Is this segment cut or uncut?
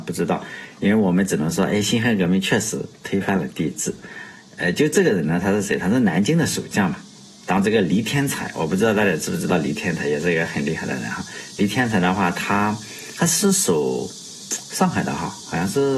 uncut